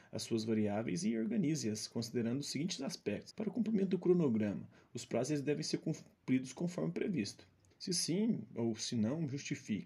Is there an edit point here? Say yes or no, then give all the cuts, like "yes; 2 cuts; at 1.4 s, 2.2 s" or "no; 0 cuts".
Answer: yes; 2 cuts; at 3.3 s, 7.7 s